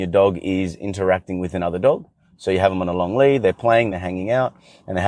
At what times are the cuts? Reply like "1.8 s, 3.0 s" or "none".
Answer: 3.9 s